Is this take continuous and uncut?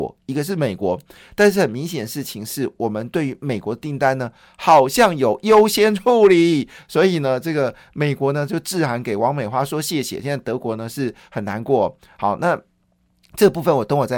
yes; 0 cuts

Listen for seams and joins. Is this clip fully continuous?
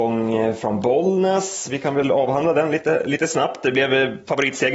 yes; 0 cuts

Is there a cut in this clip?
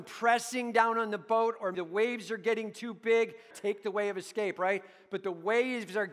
yes; 2 cuts; at 1.7 s, 3.5 s

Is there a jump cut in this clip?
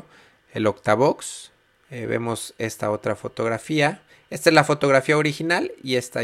yes; 1 cut; at 1.8 s

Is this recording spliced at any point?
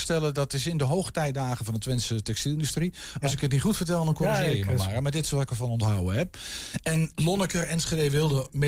no; 0 cuts

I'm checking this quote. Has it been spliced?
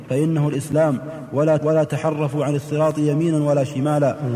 yes; 1 cut; at 1.6 s

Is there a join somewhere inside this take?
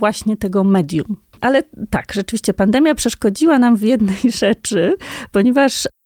no; 0 cuts

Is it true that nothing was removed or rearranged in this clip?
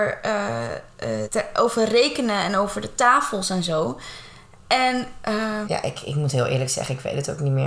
no; 2 cuts; at 1.2 s, 5.6 s

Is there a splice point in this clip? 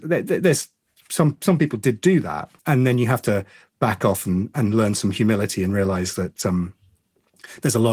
yes; 1 cut; at 2.6 s

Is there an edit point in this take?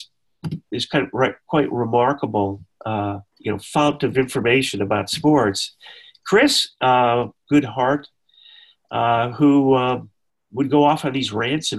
yes; 2 cuts; at 3.3 s, 7.4 s

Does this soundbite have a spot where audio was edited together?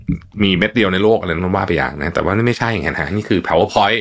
no; 0 cuts

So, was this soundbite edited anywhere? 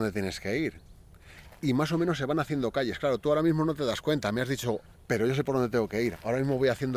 yes; 1 cut; at 5.0 s

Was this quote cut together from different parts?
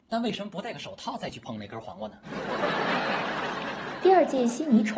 no; 0 cuts

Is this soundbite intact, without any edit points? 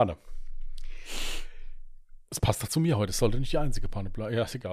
yes; 0 cuts

